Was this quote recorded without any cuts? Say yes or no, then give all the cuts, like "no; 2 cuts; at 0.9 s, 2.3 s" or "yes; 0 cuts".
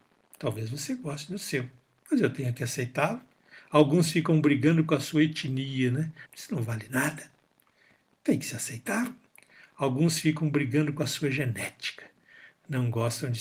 no; 1 cut; at 6.3 s